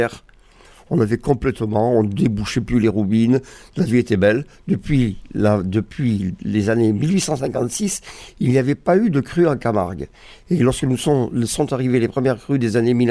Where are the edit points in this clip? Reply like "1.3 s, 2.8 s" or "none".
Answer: none